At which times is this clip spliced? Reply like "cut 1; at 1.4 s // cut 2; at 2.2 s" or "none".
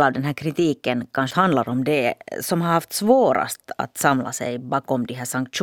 cut 1; at 1.3 s